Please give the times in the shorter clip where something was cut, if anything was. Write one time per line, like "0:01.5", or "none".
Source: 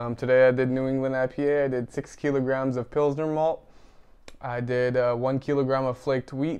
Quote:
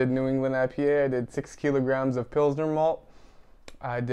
none

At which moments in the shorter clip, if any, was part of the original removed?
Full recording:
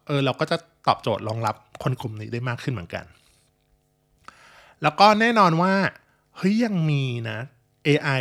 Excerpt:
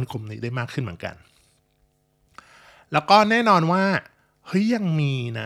none

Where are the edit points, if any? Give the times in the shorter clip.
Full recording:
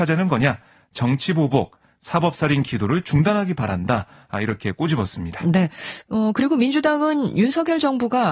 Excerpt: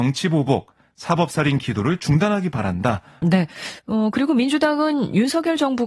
0:03.2

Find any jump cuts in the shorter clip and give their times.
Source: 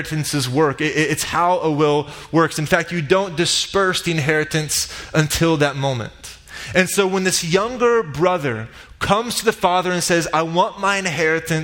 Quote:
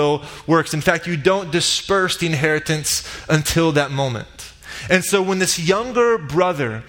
none

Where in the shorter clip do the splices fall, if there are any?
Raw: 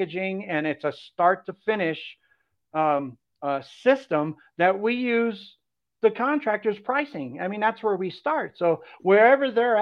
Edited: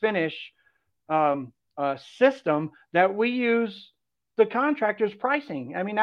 none

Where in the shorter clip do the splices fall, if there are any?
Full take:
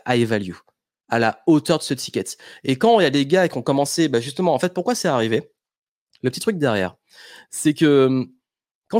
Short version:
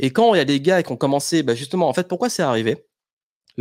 none

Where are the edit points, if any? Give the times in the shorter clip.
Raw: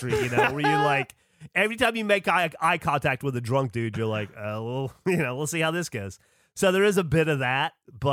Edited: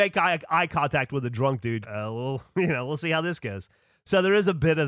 0:01.8

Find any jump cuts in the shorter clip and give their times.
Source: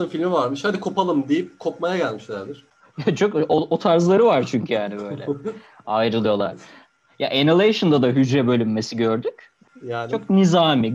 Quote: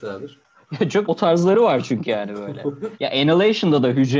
0:01.1
0:02.9

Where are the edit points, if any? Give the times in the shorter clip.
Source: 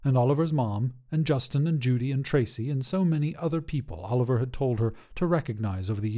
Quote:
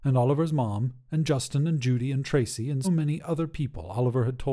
0:02.8

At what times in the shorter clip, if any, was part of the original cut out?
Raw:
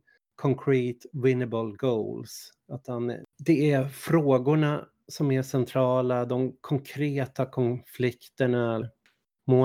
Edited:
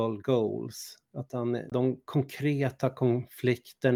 0:01.7

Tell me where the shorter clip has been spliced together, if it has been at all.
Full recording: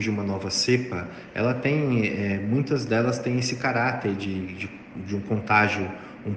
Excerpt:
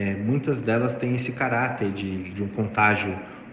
0:02.3

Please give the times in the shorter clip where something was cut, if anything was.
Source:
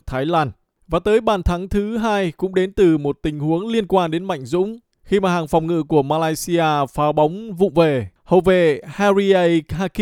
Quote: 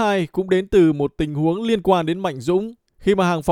none

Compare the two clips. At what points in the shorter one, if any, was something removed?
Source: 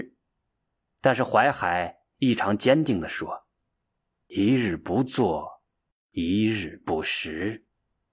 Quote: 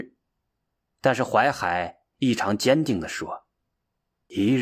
none

